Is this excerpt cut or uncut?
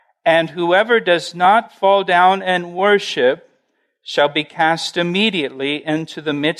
uncut